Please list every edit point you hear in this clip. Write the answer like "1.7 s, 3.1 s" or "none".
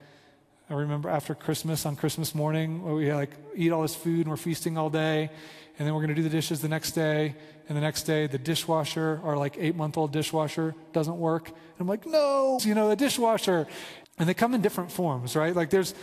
12.6 s, 14.0 s